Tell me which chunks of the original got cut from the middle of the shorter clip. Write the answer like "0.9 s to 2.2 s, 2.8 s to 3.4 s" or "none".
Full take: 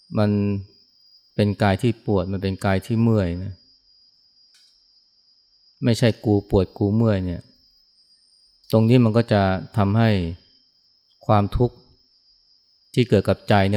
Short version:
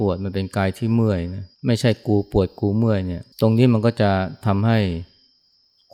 3.6 s to 5.7 s, 7.5 s to 8.6 s